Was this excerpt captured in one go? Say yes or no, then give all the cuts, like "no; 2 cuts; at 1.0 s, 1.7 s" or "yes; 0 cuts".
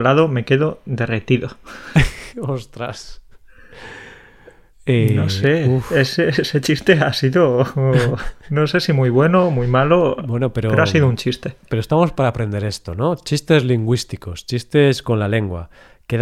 yes; 0 cuts